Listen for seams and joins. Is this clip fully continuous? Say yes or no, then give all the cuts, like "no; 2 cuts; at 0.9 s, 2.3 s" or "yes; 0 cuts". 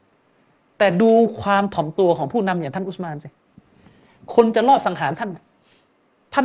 yes; 0 cuts